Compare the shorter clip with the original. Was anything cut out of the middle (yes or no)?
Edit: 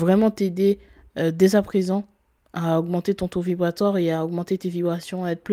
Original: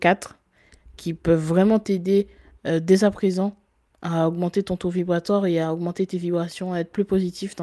no